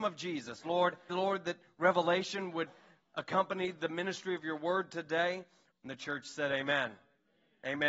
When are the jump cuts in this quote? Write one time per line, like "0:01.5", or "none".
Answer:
0:01.1
0:05.7